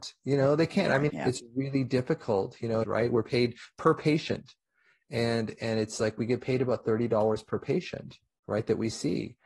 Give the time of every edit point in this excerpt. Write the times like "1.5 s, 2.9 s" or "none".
1.1 s, 2.8 s